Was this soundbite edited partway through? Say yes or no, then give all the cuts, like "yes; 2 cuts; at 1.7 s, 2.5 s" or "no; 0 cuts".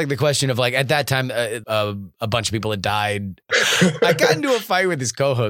yes; 2 cuts; at 1.6 s, 3.4 s